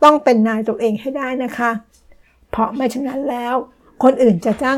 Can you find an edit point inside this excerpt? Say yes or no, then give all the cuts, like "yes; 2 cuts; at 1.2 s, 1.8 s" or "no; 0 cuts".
no; 0 cuts